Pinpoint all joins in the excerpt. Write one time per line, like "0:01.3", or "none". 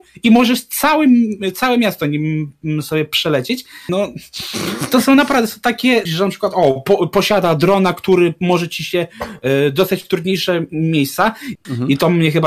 0:03.9
0:06.1
0:11.6